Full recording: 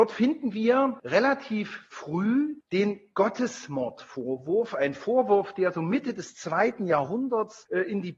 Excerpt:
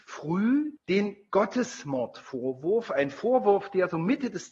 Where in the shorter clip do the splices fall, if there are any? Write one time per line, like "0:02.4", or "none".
none